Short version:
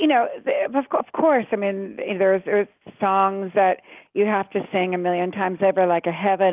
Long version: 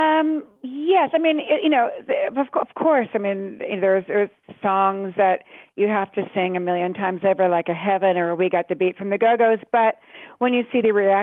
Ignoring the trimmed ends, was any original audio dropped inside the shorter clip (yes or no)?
no